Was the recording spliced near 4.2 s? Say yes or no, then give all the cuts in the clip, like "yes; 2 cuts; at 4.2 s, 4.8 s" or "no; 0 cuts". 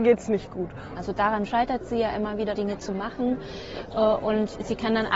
no; 2 cuts; at 1.0 s, 2.6 s